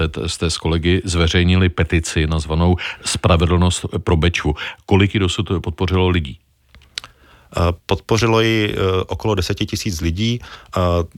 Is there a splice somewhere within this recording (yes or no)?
no